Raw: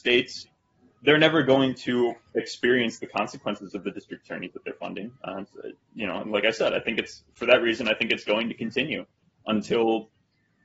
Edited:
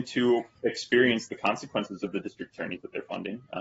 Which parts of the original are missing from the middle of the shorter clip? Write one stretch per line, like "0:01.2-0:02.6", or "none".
none